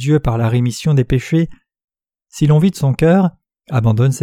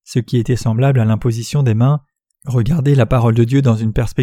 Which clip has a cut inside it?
second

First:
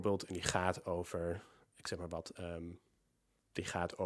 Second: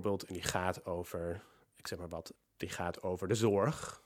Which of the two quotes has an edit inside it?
second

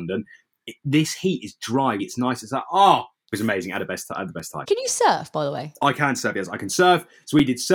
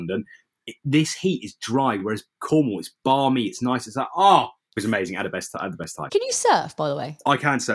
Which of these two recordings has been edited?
first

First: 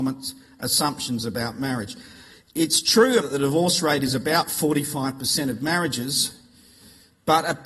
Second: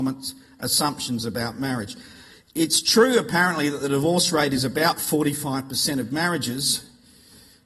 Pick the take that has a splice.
first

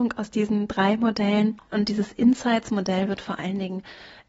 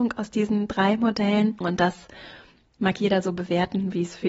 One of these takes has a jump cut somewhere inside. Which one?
second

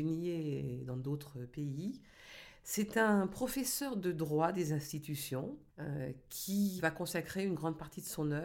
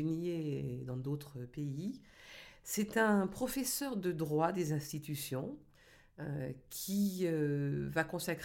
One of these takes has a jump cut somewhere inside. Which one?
first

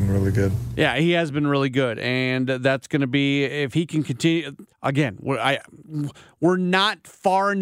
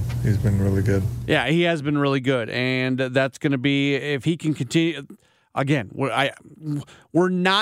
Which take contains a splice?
first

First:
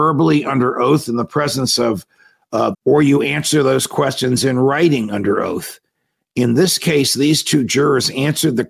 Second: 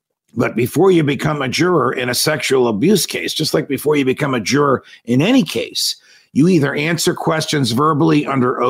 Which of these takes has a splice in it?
first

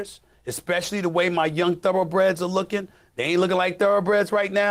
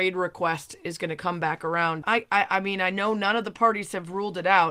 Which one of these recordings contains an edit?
second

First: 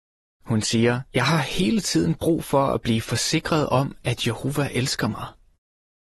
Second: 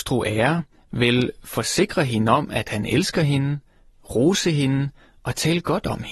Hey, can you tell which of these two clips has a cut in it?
first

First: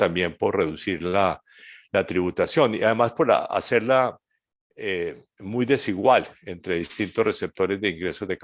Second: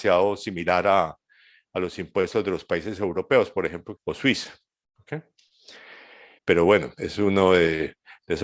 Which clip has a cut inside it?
second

